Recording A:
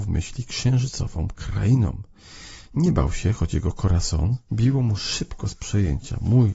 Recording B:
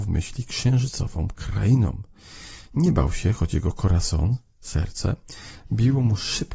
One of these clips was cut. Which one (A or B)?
A